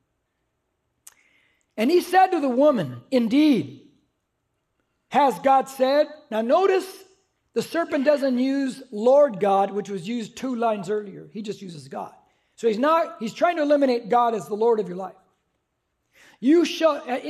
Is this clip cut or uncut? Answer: uncut